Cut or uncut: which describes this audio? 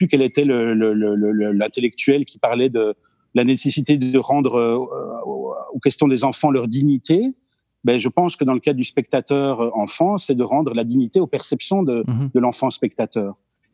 uncut